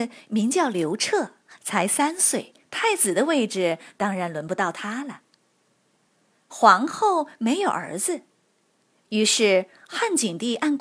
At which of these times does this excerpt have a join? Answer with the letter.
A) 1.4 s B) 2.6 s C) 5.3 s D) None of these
B